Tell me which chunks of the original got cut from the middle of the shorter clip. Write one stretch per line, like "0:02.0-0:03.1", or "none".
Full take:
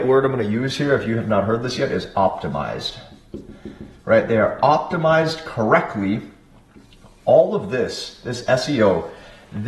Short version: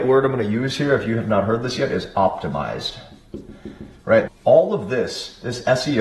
0:04.3-0:07.1